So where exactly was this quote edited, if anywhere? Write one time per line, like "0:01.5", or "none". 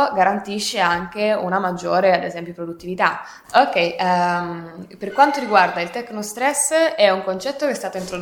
0:03.4